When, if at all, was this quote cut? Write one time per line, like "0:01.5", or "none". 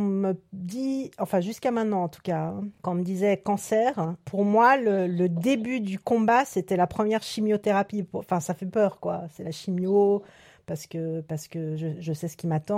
none